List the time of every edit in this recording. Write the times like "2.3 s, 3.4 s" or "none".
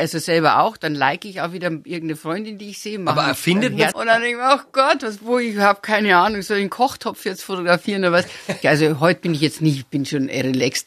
3.9 s, 8.6 s